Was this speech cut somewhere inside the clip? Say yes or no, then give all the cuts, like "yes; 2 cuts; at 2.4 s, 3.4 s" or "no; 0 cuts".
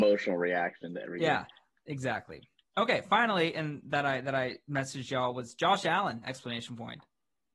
no; 0 cuts